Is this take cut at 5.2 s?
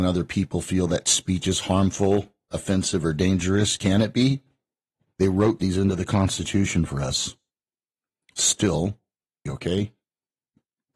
yes; 2 cuts; at 5.2 s, 9.5 s

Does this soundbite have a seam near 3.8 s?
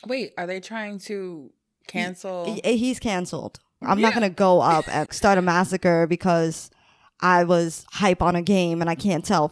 yes; 2 cuts; at 3.8 s, 5.1 s

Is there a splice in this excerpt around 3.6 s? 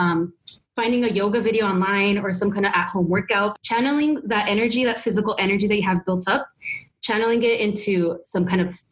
yes; 1 cut; at 3.6 s

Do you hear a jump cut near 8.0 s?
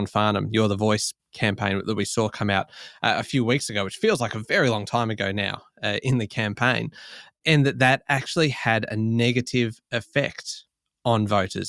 no; 0 cuts

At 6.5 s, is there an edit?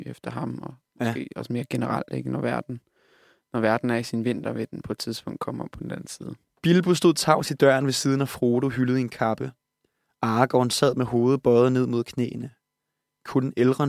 yes; 1 cut; at 6.5 s

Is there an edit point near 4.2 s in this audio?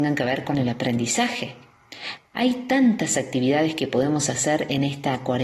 no; 1 cut; at 2.2 s

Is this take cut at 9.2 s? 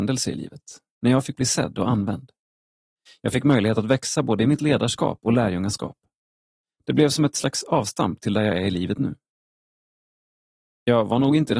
no; 0 cuts

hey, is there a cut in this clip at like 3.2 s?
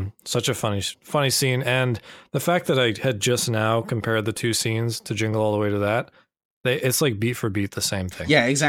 no; 1 cut; at 0.9 s

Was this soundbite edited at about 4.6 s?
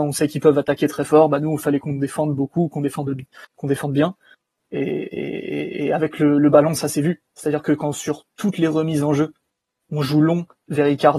yes; 1 cut; at 4.6 s

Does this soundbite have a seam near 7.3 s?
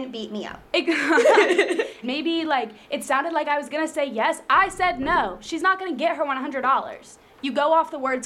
no; 1 cut; at 2.0 s

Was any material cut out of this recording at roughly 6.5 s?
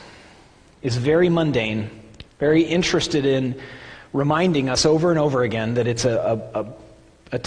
no; 1 cut; at 2.3 s

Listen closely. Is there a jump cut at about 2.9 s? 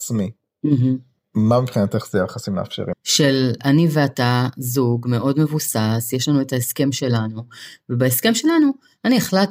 yes; 1 cut; at 2.9 s

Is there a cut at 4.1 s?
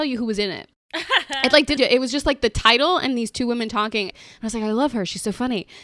yes; 2 cuts; at 1.8 s, 4.1 s

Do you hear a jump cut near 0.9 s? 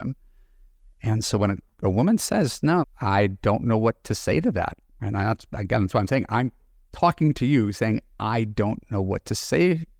no; 1 cut; at 2.8 s

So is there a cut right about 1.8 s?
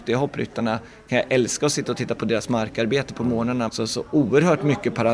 no; 1 cut; at 3.7 s

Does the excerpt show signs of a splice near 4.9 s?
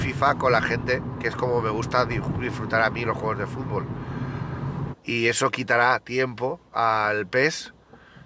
yes; 1 cut; at 4.9 s

